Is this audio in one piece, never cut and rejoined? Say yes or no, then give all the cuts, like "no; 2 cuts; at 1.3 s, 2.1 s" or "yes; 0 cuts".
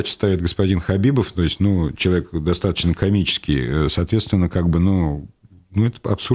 yes; 0 cuts